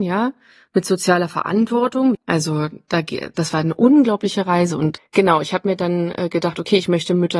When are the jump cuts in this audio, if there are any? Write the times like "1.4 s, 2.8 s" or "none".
2.1 s, 5.0 s